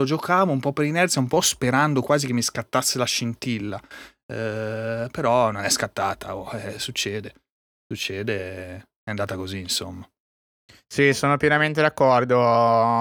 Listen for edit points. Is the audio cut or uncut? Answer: uncut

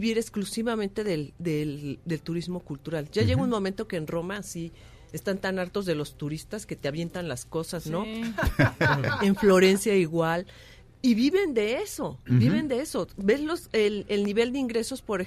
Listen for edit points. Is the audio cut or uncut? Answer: uncut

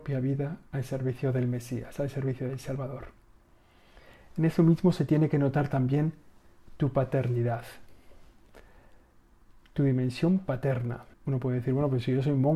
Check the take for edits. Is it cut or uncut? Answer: cut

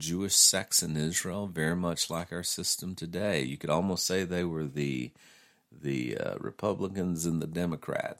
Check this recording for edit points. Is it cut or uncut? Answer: uncut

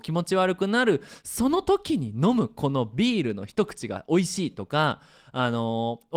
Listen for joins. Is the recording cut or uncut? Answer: uncut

